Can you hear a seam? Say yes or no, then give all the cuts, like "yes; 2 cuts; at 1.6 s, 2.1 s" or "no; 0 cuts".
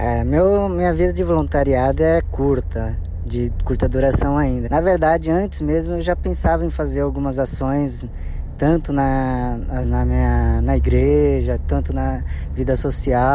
yes; 2 cuts; at 4.7 s, 9.8 s